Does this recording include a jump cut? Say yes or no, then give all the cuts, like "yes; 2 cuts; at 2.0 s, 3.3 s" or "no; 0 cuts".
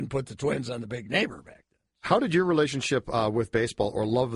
no; 0 cuts